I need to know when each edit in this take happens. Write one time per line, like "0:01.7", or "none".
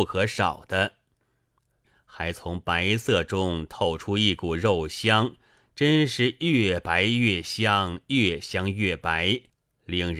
0:01.8

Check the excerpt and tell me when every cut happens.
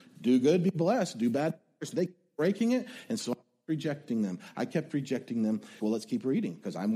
0:05.8

